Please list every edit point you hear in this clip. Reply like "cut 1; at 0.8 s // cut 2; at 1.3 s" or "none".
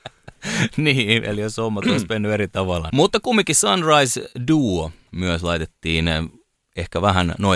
cut 1; at 2.9 s